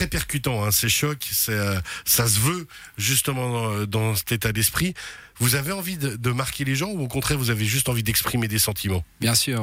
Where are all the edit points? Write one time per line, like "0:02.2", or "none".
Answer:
none